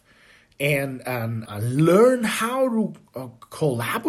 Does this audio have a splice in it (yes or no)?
yes